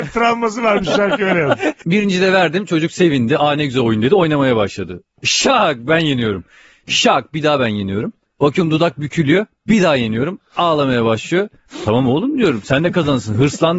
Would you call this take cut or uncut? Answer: uncut